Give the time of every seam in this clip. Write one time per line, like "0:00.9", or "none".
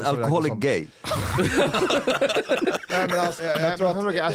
0:03.4